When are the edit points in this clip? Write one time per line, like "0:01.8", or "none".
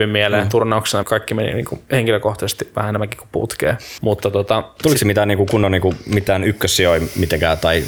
0:01.0
0:04.0